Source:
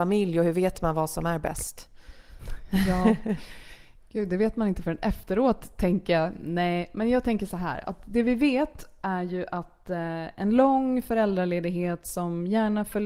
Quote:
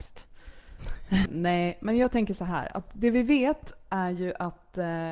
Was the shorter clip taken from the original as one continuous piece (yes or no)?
no